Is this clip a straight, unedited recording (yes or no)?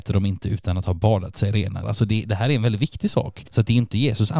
no